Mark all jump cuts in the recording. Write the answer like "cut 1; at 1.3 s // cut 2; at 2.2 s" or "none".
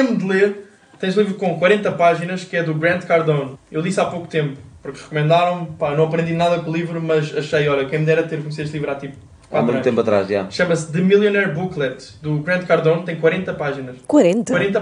none